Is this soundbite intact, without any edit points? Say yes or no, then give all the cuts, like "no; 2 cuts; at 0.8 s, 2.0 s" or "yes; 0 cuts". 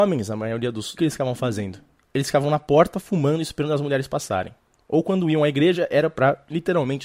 no; 1 cut; at 1.0 s